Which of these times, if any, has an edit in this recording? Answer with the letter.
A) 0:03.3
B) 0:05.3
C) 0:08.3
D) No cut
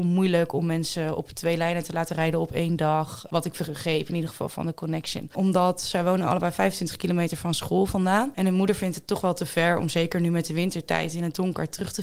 B